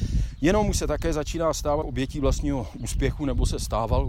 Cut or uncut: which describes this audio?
cut